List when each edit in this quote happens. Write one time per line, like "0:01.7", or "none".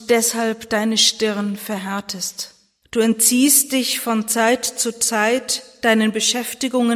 0:02.8